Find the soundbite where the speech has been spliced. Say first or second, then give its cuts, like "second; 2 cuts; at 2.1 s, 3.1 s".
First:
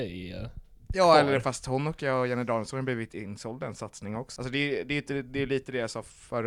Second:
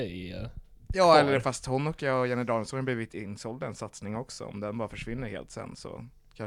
first; 1 cut; at 4.4 s